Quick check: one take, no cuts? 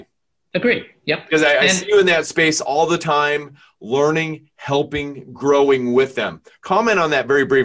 yes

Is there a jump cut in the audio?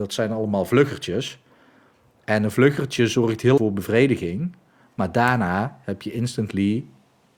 yes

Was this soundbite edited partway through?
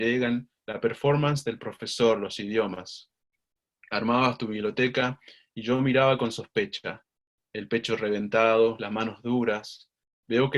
no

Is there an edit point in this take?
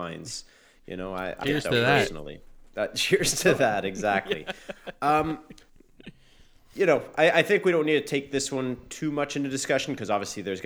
yes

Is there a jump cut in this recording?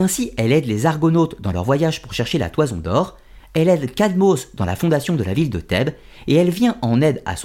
yes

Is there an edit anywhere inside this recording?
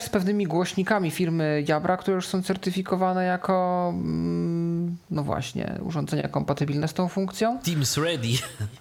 yes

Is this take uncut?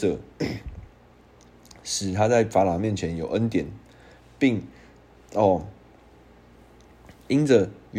yes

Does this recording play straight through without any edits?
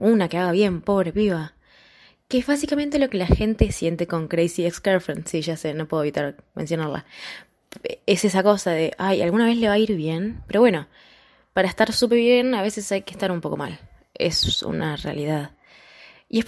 yes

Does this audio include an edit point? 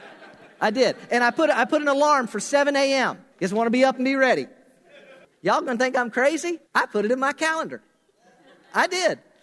yes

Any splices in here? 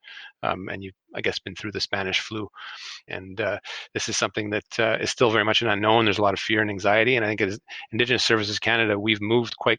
yes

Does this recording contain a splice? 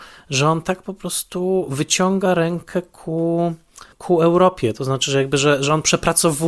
yes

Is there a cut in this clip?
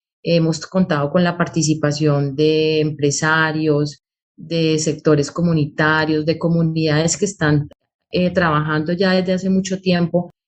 no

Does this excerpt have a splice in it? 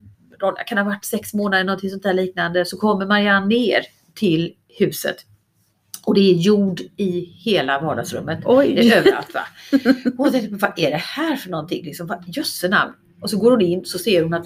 no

